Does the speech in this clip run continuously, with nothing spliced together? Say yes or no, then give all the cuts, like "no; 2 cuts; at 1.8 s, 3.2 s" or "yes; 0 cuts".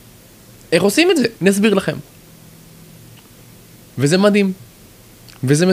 no; 1 cut; at 1.4 s